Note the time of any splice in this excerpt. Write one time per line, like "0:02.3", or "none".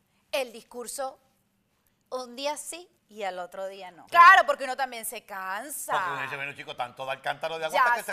0:03.0
0:04.1